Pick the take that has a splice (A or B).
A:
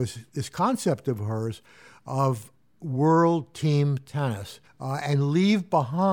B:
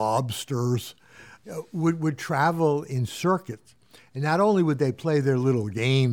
A